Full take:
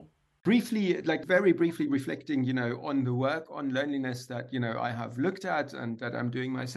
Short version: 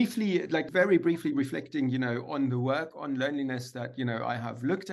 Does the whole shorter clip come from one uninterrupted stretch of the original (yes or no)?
yes